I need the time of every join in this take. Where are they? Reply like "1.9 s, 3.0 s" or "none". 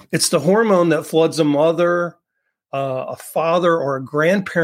none